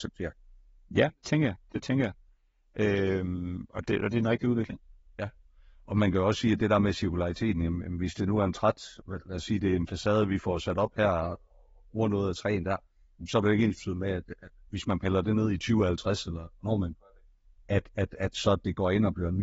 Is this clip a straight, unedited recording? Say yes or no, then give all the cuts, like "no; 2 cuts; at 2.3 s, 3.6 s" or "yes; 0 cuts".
yes; 0 cuts